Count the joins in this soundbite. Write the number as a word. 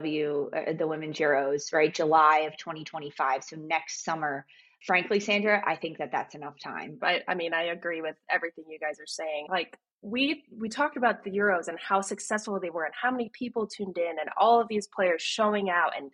two